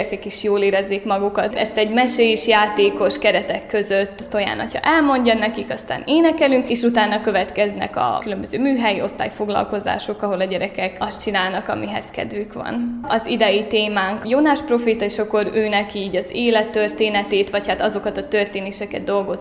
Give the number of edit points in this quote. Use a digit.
2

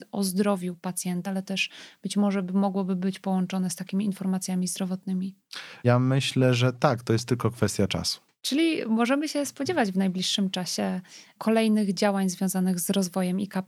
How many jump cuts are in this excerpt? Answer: 1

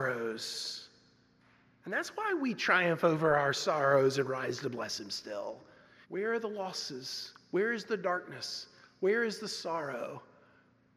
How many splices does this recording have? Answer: 1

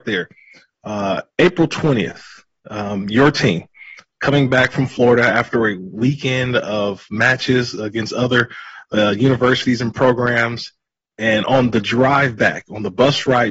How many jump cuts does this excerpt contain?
0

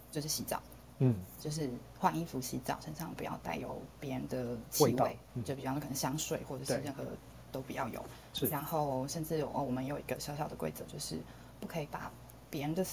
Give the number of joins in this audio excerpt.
0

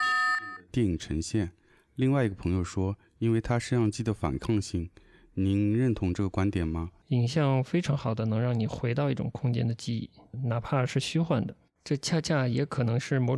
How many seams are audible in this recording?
1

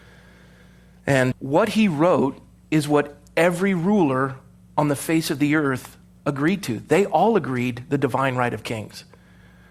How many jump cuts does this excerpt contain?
1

